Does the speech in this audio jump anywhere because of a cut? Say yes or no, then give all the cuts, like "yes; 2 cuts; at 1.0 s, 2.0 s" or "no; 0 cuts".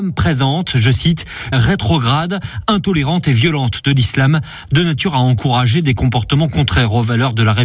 yes; 1 cut; at 1.5 s